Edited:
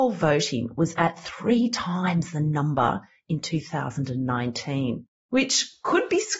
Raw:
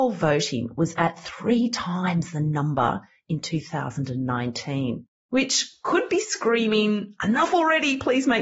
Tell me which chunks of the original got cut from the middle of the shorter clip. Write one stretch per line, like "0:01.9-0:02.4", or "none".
none